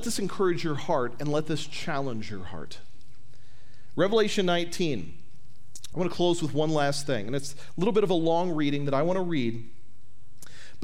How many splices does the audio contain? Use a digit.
1